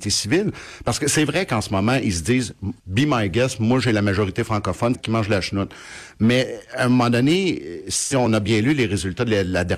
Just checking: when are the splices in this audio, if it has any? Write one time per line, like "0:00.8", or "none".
0:02.8
0:04.9